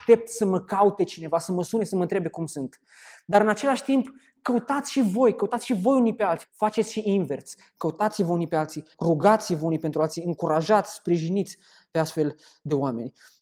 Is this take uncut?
no; 2 cuts; at 6.4 s, 8.9 s

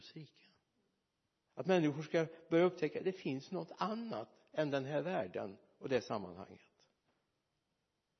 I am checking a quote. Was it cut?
no; 0 cuts

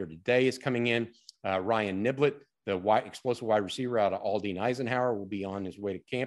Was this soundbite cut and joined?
no; 0 cuts

